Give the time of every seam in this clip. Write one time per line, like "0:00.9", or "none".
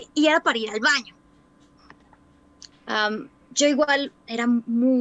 0:02.7